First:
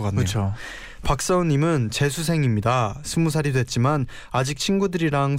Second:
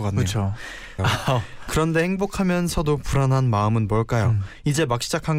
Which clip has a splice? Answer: second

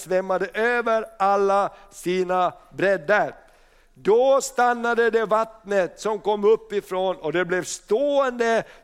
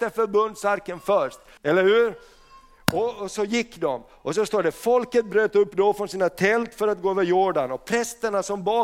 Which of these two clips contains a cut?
second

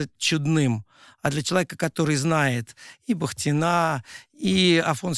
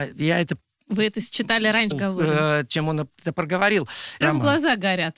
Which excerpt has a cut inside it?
second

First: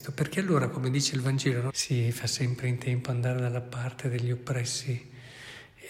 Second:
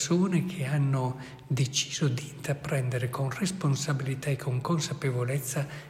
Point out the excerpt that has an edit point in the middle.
first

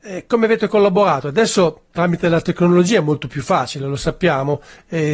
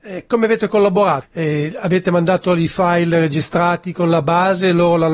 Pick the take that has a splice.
second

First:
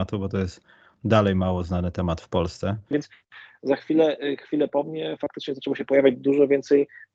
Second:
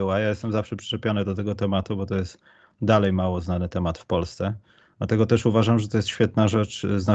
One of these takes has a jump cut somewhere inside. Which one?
first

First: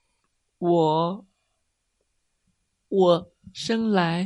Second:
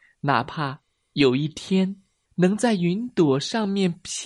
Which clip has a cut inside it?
second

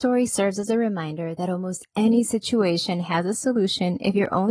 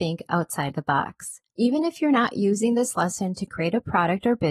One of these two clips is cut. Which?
second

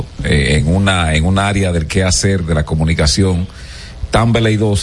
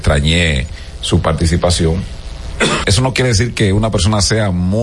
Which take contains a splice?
second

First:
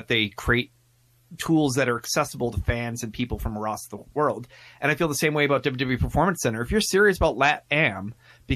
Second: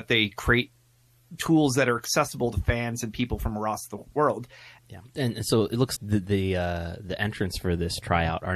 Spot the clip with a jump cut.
second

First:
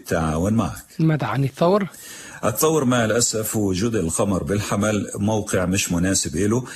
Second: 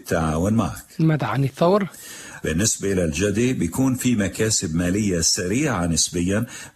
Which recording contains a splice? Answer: second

